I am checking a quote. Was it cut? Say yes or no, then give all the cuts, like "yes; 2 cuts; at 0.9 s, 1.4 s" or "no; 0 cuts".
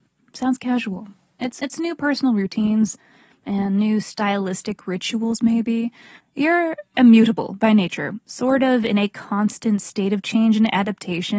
yes; 2 cuts; at 1.6 s, 6.2 s